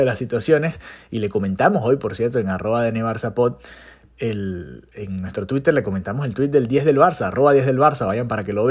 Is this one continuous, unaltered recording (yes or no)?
yes